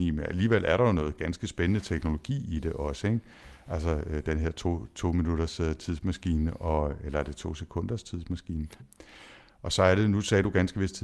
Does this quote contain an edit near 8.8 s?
yes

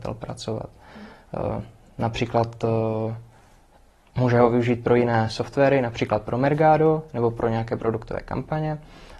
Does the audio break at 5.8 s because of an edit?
no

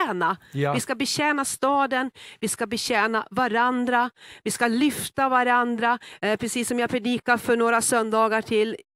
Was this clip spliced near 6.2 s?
yes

